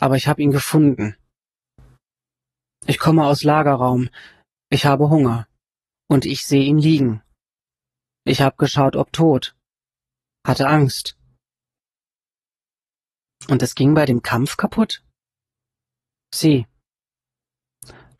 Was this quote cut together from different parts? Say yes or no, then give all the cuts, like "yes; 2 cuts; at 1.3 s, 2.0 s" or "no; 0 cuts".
yes; 1 cut; at 13.3 s